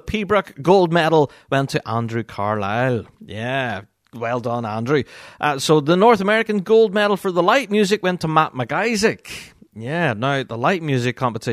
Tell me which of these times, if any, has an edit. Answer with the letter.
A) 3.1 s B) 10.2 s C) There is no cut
C